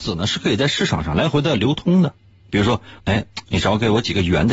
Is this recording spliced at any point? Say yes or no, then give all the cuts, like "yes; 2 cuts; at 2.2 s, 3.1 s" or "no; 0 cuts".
yes; 1 cut; at 3.0 s